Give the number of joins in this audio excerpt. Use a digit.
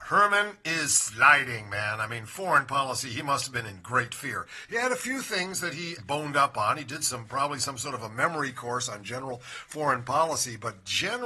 1